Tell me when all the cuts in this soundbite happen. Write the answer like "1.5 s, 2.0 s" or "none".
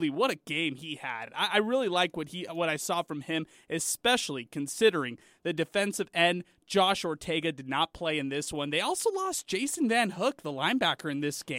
none